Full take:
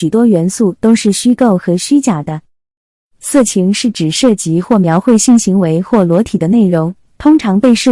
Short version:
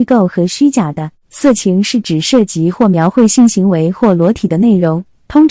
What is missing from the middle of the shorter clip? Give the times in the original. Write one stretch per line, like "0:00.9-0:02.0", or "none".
0:02.5-0:03.1